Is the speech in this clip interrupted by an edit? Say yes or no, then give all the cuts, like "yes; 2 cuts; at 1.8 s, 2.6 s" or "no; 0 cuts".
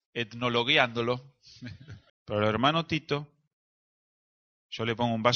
yes; 1 cut; at 2.1 s